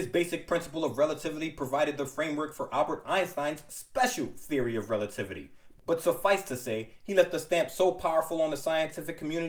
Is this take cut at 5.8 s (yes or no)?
yes